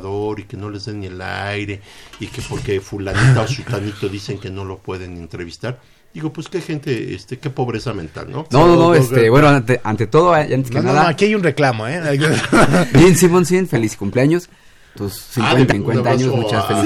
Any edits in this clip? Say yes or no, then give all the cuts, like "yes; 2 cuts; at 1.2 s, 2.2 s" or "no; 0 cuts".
yes; 2 cuts; at 8.5 s, 15.7 s